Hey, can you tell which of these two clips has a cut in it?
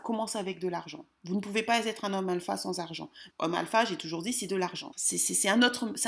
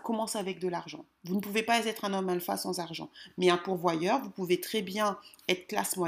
first; 2 cuts; at 3.3 s, 4.9 s

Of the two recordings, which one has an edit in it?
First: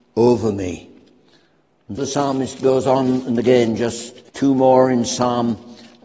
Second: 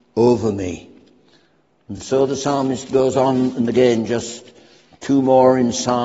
first; 2 cuts; at 2.0 s, 4.3 s

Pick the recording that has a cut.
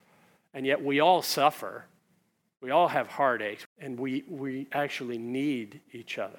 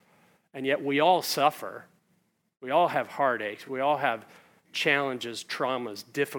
first; 1 cut; at 3.7 s

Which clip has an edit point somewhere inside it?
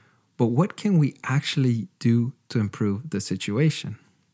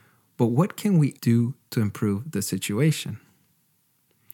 second; 1 cut; at 1.2 s

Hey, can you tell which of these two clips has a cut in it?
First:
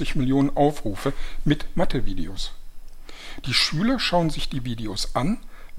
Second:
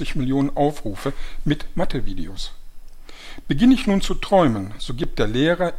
first; 1 cut; at 3.4 s

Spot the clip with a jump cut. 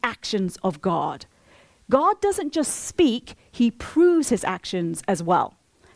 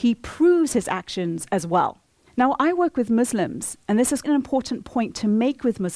second; 2 cuts; at 2.3 s, 4.2 s

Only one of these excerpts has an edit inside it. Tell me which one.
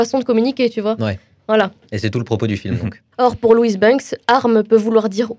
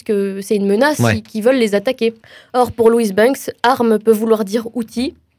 first; 1 cut; at 3.1 s

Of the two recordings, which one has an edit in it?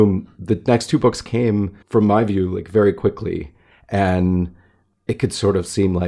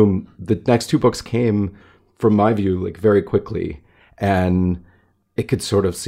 first; 1 cut; at 1.8 s

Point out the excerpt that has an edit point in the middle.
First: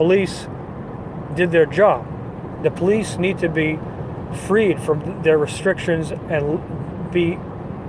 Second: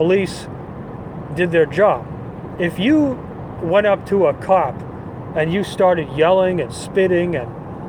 first; 1 cut; at 2.6 s

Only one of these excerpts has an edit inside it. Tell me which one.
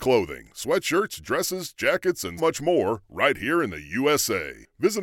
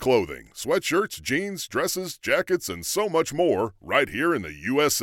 first; 2 cuts; at 1.2 s, 2.4 s

